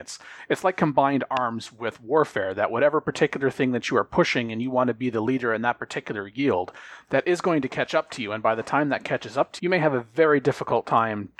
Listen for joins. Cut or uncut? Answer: cut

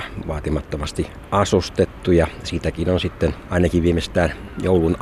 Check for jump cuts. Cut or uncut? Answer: uncut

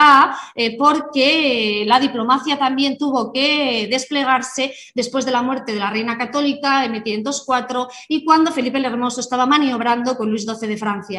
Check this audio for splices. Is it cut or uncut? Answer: uncut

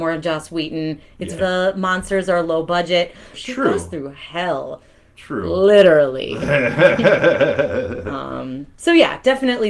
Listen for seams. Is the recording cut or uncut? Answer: cut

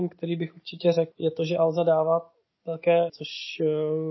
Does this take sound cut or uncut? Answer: cut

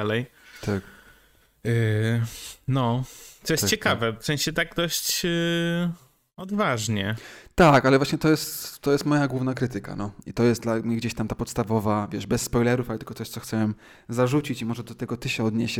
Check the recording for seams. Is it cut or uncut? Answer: cut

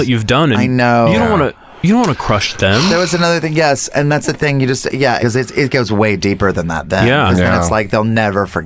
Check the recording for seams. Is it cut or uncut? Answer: cut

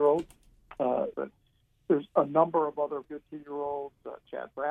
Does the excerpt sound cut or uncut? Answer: cut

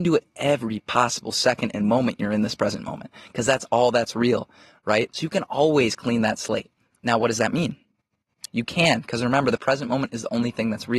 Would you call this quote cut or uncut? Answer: cut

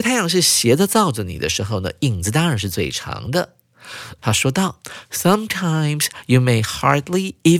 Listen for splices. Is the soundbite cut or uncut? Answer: cut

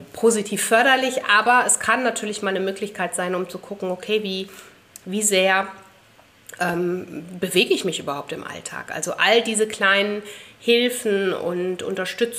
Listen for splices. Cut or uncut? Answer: uncut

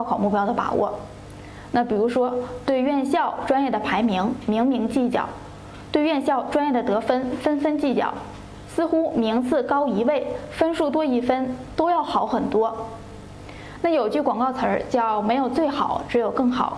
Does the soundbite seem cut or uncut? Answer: uncut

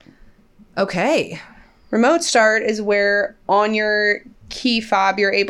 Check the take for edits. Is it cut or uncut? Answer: uncut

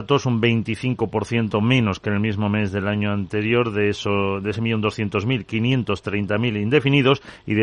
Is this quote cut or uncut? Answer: uncut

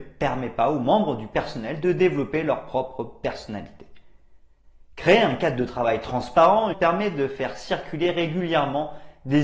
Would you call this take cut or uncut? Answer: cut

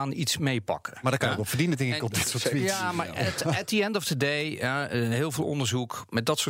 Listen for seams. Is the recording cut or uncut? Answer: uncut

